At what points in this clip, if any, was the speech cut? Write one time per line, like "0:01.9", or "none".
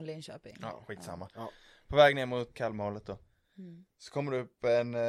0:02.5